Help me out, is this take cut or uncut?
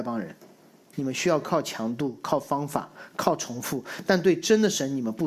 cut